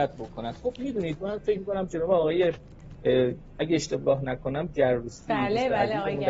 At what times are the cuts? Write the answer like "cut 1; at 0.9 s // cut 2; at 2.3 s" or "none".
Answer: none